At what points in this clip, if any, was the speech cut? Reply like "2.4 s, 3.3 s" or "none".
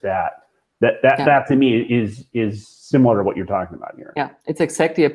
none